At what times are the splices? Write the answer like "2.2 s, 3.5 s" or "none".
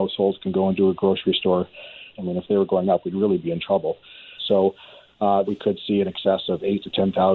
2.1 s, 4.4 s, 5.4 s